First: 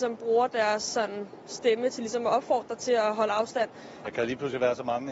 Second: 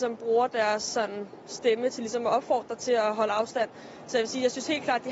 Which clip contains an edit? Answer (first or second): first